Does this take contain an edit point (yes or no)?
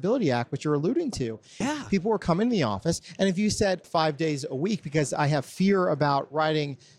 yes